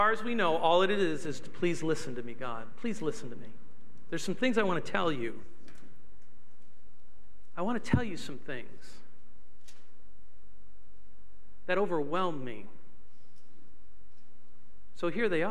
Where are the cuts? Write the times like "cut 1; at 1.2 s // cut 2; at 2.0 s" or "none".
none